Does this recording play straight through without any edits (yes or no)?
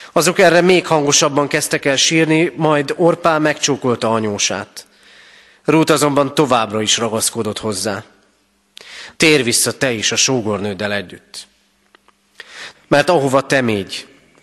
no